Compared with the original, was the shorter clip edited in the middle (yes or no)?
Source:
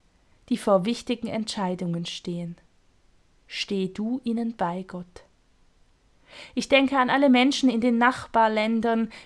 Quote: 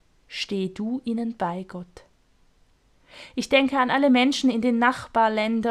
no